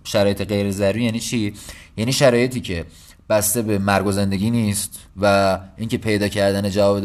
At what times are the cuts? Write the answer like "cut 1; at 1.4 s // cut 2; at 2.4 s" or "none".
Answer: cut 1; at 5.1 s